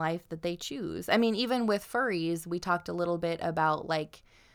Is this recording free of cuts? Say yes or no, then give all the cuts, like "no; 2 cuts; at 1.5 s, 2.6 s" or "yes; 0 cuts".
yes; 0 cuts